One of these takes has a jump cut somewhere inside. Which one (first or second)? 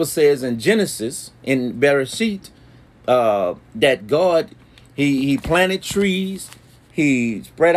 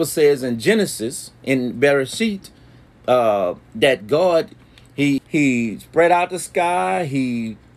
second